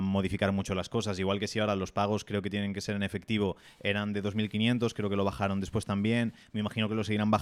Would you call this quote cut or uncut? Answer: uncut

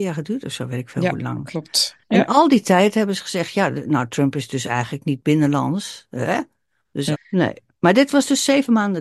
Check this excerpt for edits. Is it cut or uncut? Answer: cut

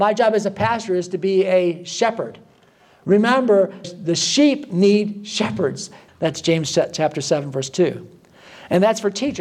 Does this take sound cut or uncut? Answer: cut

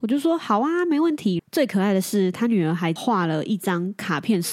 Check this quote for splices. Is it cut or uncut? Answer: cut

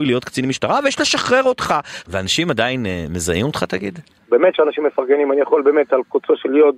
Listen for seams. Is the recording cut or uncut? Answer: cut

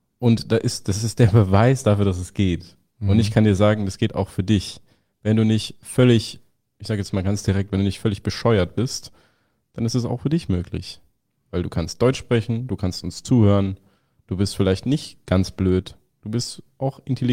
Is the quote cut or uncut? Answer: uncut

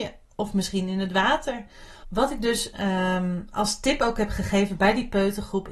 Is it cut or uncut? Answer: cut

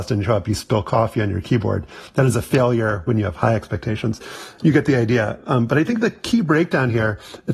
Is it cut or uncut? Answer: uncut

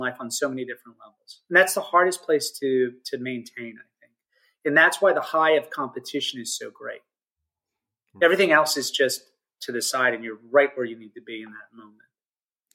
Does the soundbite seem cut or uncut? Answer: uncut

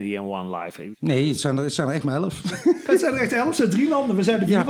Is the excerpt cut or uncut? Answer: cut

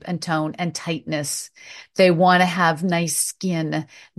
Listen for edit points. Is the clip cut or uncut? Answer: uncut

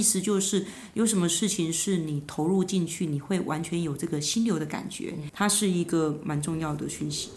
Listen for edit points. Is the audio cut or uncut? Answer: cut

